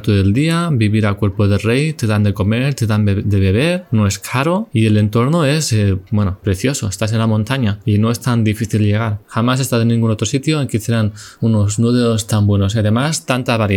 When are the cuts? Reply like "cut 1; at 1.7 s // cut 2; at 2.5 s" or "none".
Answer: cut 1; at 6.4 s // cut 2; at 9.2 s